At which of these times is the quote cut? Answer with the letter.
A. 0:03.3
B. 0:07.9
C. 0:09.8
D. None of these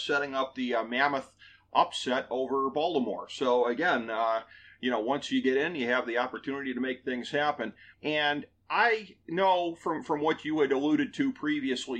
B